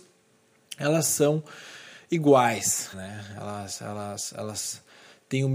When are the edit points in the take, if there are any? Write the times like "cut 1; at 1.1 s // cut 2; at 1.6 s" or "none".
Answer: cut 1; at 2.9 s

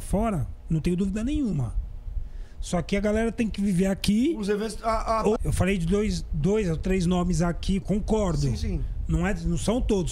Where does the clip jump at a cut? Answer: cut 1; at 5.4 s // cut 2; at 7.8 s

